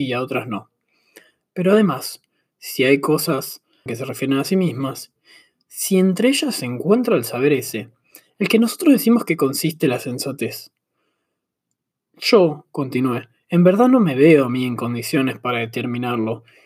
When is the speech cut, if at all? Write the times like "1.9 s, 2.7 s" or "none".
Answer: 3.9 s